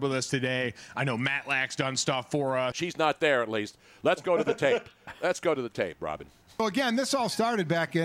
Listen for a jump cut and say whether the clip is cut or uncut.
cut